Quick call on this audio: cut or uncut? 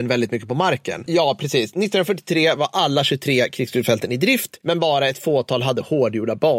cut